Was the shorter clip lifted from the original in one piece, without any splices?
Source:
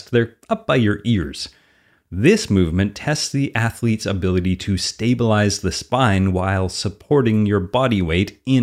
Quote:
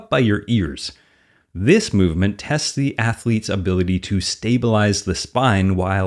yes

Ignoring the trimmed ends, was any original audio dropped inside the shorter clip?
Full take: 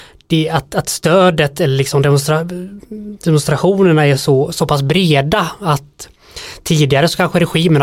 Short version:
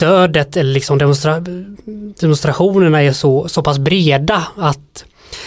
no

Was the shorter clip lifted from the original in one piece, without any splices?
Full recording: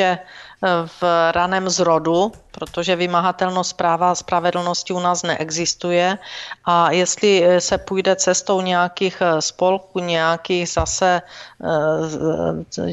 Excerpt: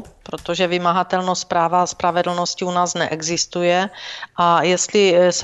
yes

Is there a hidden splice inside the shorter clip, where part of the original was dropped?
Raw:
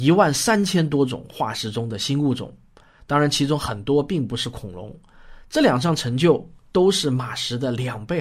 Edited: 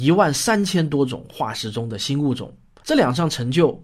yes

